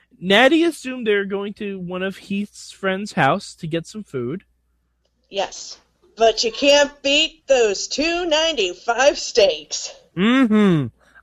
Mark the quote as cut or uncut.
cut